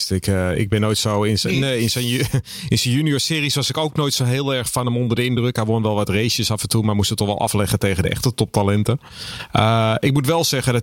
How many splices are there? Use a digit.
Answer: 0